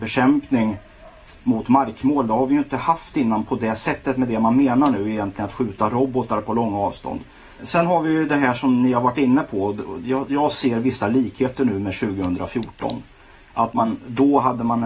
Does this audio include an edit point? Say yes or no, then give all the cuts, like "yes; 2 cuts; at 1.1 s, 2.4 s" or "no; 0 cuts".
yes; 1 cut; at 7.6 s